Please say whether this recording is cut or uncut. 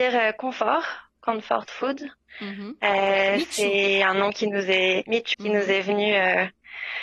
cut